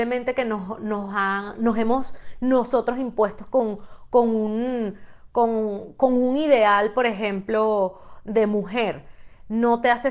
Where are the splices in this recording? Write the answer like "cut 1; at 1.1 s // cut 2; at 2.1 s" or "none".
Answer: none